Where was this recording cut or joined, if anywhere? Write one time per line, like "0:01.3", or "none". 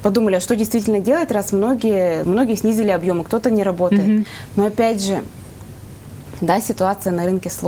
0:02.2